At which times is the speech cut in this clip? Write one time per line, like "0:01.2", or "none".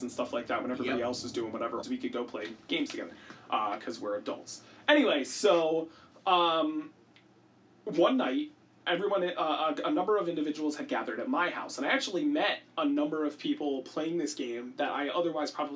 0:01.8